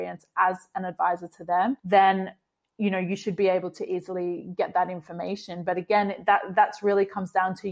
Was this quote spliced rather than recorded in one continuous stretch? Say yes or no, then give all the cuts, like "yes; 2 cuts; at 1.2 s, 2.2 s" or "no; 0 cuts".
no; 0 cuts